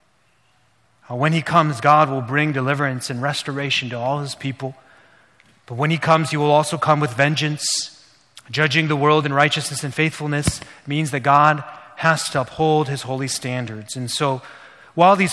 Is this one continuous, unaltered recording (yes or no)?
yes